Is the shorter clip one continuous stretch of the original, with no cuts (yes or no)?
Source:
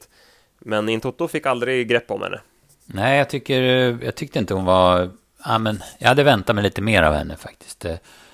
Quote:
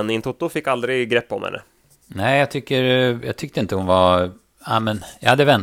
yes